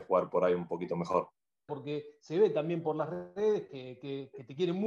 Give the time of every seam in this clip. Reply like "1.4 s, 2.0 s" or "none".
1.7 s